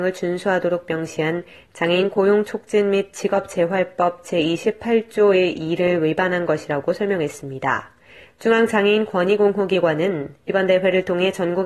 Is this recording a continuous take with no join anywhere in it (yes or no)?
no